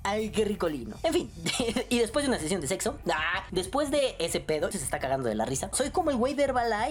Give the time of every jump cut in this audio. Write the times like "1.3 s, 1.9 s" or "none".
4.7 s, 5.7 s